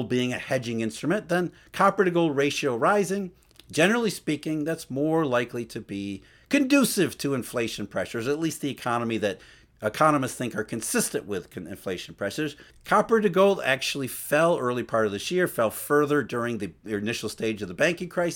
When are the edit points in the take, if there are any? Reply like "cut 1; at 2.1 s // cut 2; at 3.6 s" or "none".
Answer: cut 1; at 12.7 s